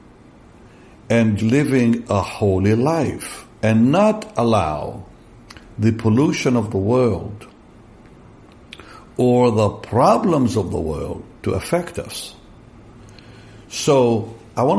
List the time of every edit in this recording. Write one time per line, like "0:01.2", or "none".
0:01.4
0:03.5

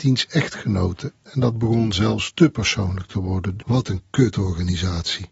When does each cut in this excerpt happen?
0:01.2
0:03.6

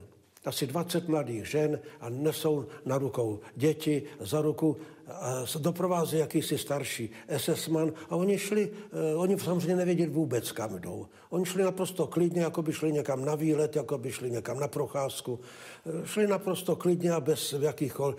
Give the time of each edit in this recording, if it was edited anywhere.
0:04.2

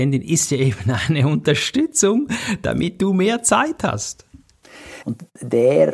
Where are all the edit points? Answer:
0:05.0

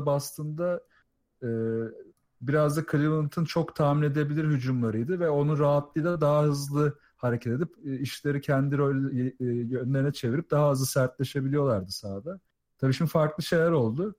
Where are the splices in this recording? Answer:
none

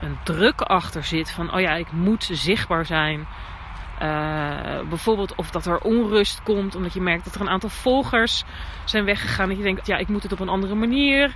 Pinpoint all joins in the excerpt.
0:09.8

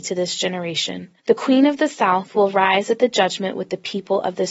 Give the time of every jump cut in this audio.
0:01.2

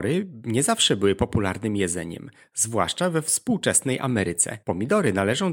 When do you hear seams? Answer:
none

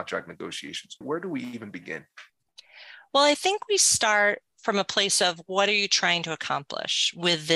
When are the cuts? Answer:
0:01.0

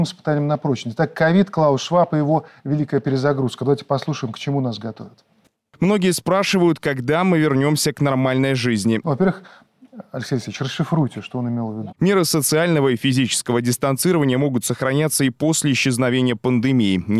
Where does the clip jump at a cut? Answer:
0:09.0
0:11.9

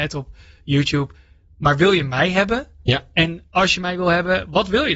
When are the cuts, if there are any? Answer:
none

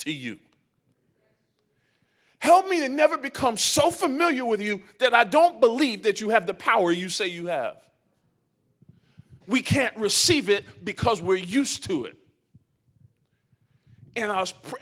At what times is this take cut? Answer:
0:09.4

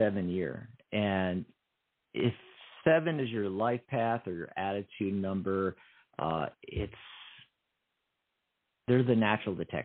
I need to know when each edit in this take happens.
none

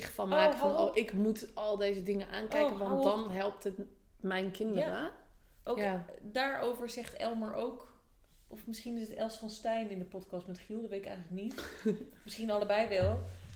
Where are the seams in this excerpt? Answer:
none

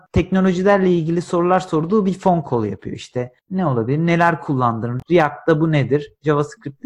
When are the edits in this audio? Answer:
none

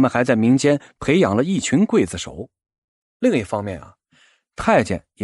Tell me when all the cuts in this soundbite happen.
0:03.0

